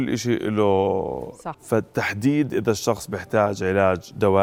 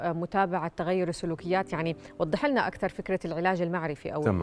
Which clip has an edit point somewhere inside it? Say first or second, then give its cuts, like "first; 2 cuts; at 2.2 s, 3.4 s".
first; 1 cut; at 1.5 s